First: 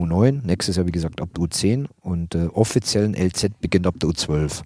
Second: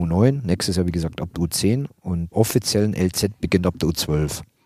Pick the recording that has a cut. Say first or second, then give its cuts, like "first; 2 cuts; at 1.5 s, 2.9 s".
second; 1 cut; at 2.3 s